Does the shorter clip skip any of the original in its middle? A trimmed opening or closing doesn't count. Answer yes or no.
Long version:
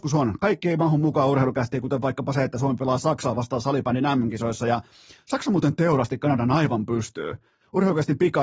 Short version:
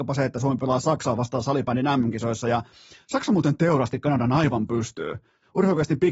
no